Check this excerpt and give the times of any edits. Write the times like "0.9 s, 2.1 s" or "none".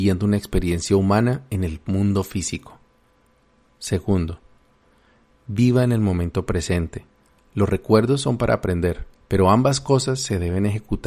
9.2 s